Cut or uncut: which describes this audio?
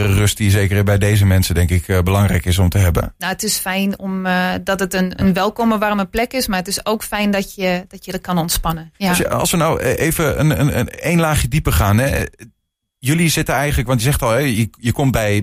uncut